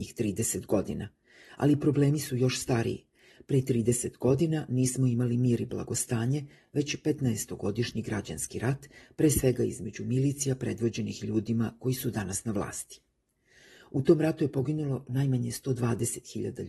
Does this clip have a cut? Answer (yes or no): no